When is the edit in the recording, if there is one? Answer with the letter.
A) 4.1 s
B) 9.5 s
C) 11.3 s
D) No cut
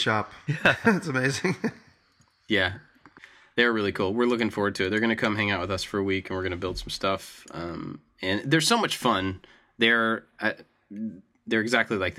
D